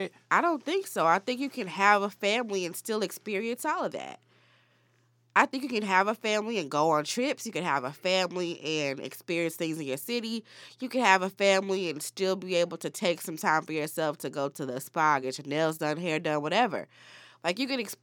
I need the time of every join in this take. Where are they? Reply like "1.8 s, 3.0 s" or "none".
none